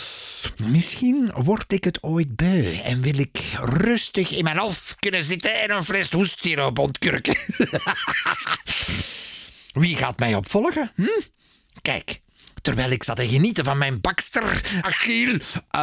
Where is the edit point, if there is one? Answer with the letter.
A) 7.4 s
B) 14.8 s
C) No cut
B